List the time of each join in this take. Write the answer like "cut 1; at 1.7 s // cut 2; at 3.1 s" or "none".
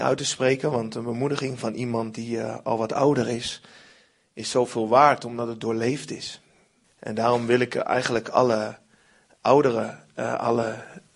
cut 1; at 6.8 s